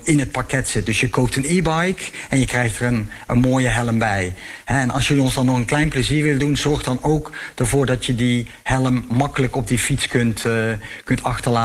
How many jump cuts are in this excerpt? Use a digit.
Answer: 0